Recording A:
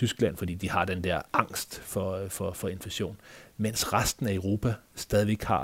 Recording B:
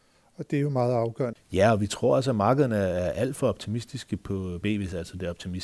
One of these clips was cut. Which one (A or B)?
B